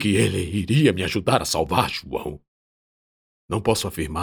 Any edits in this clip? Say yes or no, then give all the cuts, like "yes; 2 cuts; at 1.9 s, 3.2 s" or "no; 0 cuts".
yes; 1 cut; at 3.3 s